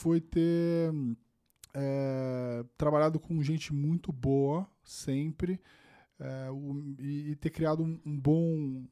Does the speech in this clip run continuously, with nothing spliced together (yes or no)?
yes